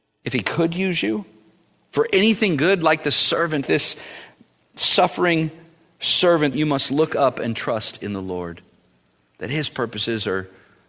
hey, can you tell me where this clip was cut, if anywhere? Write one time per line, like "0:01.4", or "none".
0:03.7
0:06.5